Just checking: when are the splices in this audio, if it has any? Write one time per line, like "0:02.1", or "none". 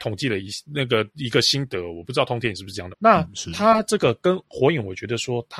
0:02.9